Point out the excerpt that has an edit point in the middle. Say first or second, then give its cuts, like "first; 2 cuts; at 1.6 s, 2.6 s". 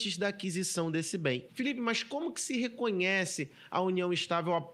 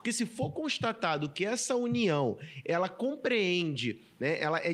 first; 1 cut; at 1.5 s